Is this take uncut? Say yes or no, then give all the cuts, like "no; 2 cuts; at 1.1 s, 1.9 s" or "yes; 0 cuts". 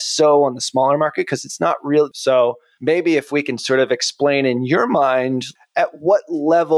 no; 1 cut; at 2.1 s